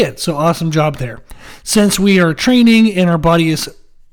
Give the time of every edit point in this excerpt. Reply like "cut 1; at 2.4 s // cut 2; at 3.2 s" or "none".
none